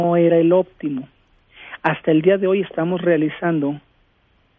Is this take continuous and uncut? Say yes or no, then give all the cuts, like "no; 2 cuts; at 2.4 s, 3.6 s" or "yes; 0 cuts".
yes; 0 cuts